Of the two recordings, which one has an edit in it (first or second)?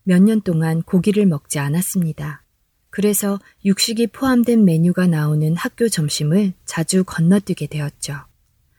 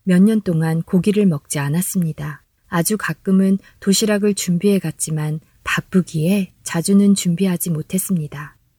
second